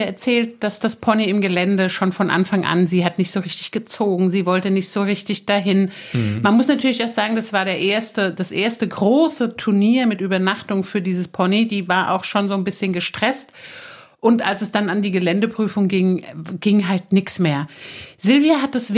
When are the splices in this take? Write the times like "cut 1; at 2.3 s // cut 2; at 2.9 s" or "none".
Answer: none